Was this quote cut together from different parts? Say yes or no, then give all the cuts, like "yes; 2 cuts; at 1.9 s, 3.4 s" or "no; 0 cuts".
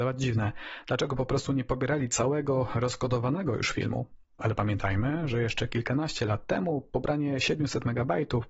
no; 0 cuts